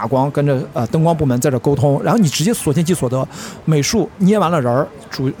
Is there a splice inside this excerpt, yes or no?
yes